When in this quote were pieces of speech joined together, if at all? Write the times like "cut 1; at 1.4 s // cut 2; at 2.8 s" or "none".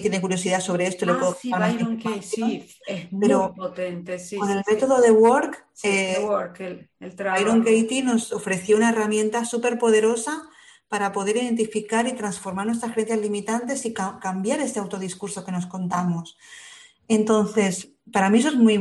none

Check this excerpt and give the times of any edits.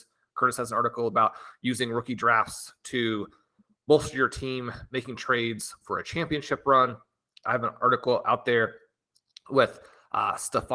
none

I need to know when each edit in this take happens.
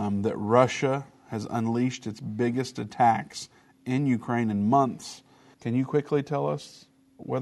cut 1; at 5.5 s

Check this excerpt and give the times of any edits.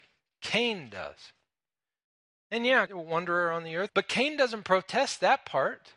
cut 1; at 2.9 s // cut 2; at 3.9 s

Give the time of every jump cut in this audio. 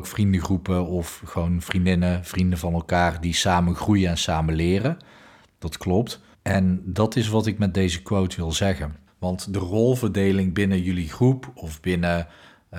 cut 1; at 6.3 s // cut 2; at 9.1 s

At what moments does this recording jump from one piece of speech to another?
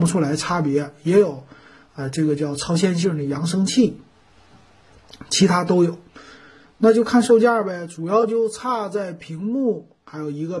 none

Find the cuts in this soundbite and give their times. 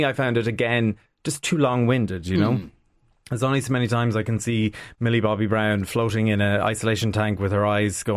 none

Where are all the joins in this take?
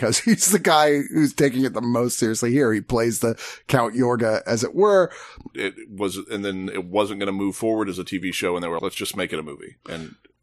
cut 1; at 5.5 s // cut 2; at 8.8 s

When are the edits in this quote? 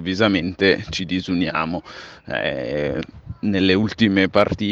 none

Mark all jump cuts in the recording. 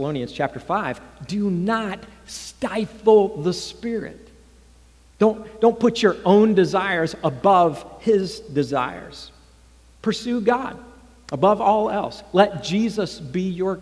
none

